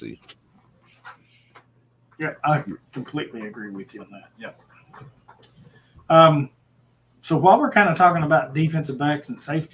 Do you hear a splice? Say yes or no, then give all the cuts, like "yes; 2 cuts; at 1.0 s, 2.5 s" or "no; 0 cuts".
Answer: yes; 1 cut; at 2.1 s